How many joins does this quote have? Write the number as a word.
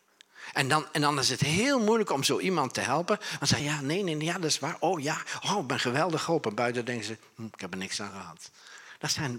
one